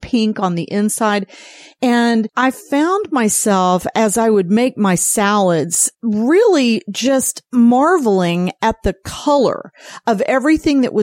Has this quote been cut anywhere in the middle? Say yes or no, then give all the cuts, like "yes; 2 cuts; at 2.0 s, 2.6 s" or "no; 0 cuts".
no; 0 cuts